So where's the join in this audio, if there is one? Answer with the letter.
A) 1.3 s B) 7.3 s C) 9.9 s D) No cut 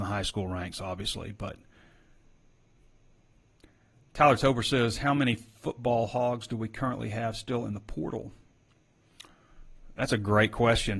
D